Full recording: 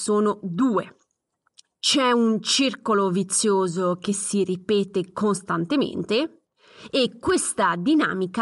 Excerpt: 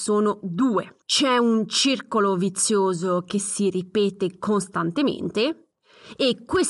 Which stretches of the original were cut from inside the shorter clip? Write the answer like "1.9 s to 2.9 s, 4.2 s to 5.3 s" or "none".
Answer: 1.0 s to 1.8 s

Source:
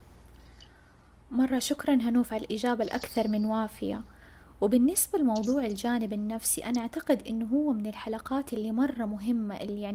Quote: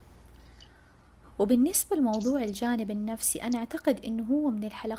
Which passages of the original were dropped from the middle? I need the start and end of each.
1.2 s to 4.4 s

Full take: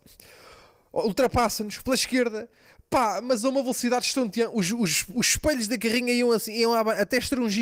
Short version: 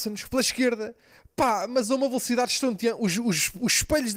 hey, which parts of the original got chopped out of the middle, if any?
none

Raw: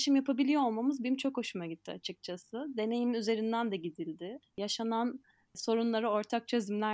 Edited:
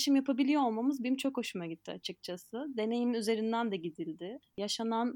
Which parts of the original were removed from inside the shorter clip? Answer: none

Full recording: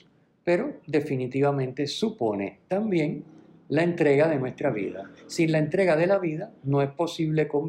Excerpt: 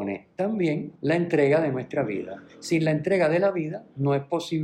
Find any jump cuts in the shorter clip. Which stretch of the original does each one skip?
3.3 s to 3.6 s

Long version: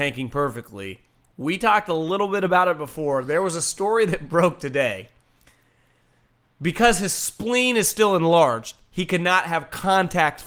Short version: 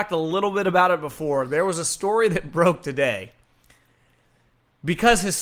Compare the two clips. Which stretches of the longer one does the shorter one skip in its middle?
none

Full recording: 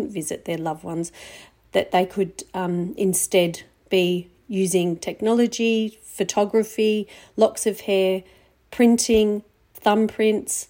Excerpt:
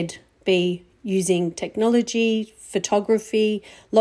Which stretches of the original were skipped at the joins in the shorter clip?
none

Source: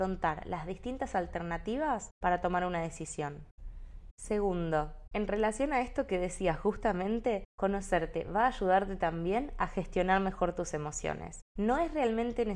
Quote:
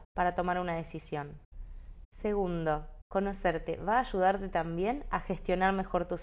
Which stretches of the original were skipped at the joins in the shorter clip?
5.1 s to 7.5 s

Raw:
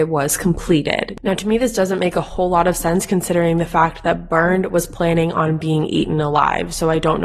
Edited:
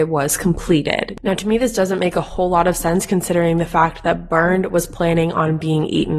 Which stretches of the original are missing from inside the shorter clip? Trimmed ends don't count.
none

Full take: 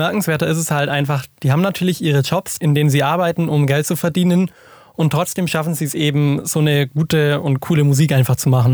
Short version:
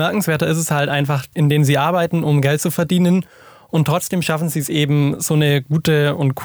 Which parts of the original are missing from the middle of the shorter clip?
1.3 s to 2.6 s

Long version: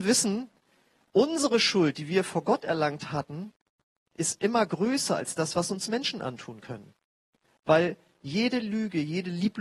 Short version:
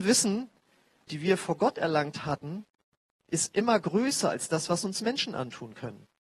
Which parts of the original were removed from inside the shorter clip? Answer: 1.1 s to 1.9 s

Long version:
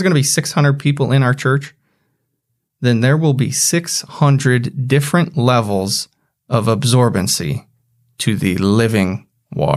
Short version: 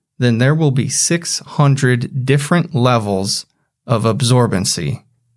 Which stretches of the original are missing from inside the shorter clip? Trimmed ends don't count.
none

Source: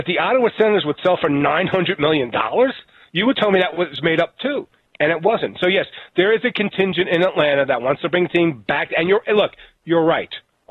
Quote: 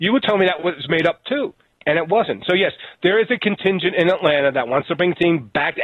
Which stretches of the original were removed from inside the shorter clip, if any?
none

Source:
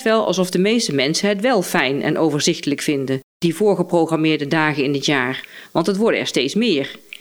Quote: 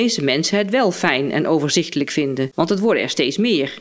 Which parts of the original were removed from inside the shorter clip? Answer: 3.2 s to 5.7 s

